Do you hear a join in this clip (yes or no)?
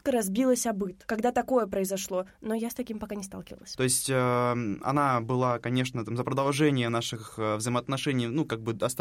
yes